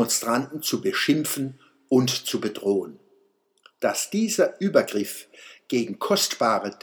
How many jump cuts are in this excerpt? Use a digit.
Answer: 1